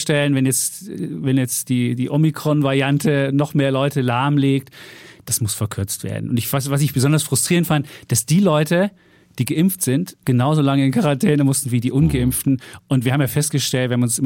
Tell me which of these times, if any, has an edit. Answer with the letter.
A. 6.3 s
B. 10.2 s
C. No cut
B